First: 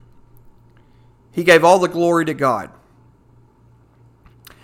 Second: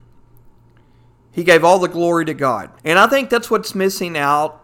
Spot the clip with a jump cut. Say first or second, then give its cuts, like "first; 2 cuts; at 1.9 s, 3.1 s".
second; 1 cut; at 2.8 s